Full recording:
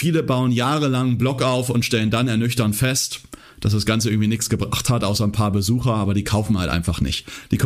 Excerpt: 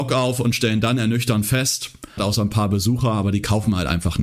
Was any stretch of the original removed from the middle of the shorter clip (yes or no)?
yes